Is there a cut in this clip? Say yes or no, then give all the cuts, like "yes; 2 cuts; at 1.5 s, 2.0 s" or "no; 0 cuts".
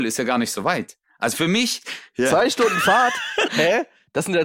yes; 2 cuts; at 1.8 s, 3.5 s